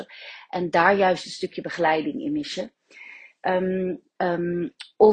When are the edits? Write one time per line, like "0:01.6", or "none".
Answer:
0:04.2